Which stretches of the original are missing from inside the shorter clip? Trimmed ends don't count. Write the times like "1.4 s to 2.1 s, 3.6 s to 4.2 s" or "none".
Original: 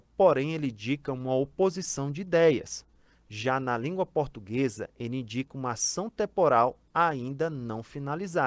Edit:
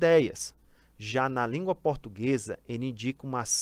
none